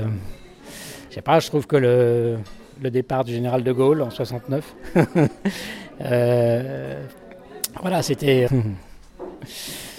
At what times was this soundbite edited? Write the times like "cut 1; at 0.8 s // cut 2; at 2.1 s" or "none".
cut 1; at 1.1 s // cut 2; at 8.5 s